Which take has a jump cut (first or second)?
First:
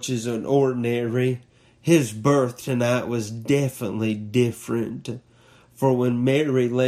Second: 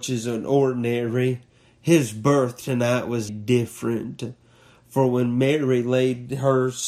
second